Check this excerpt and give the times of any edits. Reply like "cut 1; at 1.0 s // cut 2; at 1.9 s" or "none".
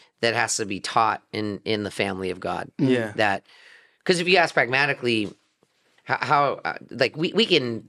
none